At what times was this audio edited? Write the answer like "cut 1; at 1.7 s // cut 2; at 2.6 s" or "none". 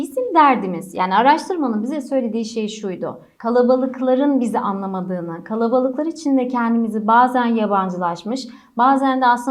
cut 1; at 3.4 s